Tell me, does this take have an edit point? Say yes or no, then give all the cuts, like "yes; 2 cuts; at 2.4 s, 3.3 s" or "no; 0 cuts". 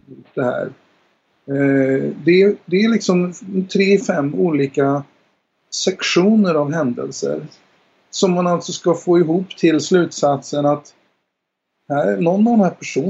yes; 1 cut; at 4.0 s